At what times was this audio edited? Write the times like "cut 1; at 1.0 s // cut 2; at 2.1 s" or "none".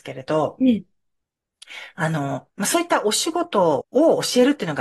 cut 1; at 3.8 s